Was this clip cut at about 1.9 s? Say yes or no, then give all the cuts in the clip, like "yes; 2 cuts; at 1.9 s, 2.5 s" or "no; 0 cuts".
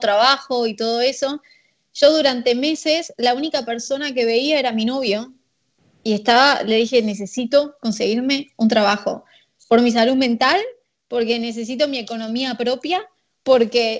no; 0 cuts